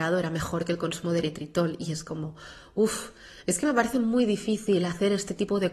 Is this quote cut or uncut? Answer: uncut